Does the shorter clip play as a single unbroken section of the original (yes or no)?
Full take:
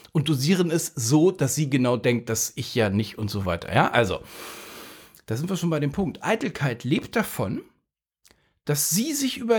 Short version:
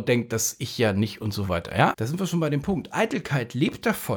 no